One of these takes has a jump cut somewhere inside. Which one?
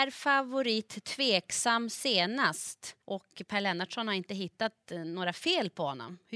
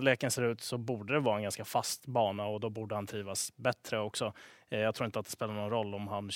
first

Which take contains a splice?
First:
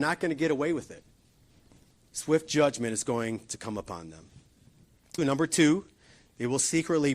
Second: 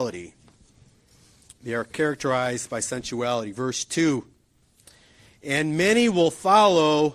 first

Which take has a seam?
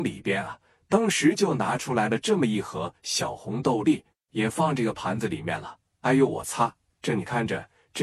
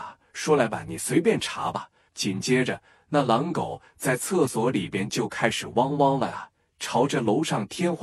second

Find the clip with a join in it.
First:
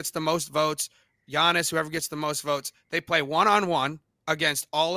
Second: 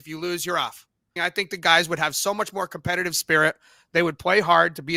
second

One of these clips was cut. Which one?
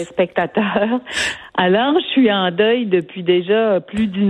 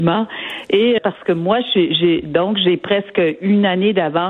second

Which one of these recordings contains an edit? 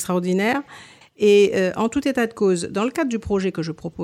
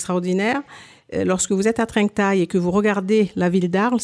first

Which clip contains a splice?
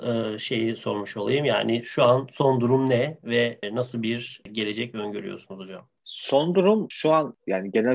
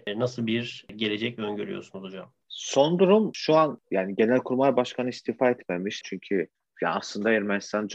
second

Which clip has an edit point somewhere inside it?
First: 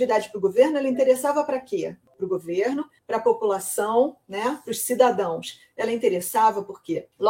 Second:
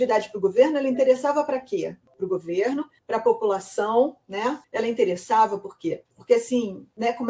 second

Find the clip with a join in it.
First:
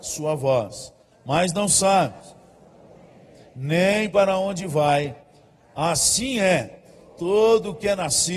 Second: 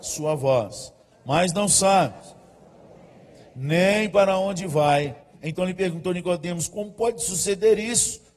second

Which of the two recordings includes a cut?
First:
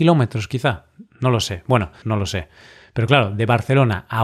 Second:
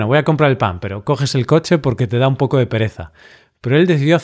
first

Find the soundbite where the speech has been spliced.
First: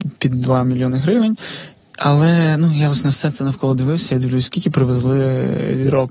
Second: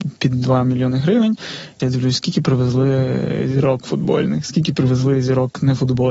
second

